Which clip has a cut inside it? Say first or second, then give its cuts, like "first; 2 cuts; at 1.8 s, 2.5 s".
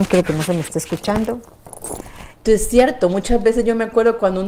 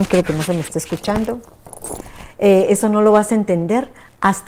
first; 1 cut; at 2.3 s